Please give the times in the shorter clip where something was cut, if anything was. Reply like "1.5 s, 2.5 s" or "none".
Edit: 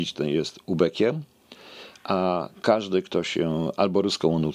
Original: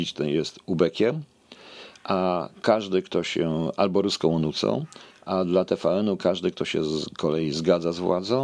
none